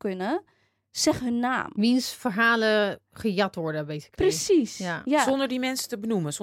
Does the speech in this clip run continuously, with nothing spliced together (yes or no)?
yes